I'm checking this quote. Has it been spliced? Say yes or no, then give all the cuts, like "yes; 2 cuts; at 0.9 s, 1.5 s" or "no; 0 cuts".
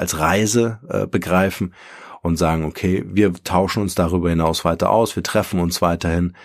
no; 0 cuts